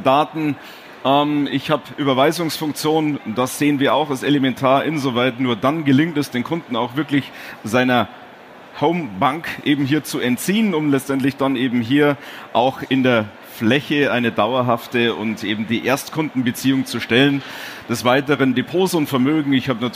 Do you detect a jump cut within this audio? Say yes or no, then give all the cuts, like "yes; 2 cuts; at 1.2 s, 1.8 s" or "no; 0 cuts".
no; 0 cuts